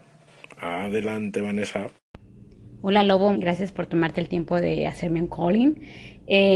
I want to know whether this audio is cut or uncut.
cut